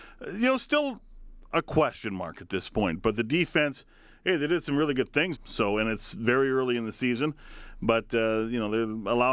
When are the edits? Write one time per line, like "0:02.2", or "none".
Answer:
0:05.3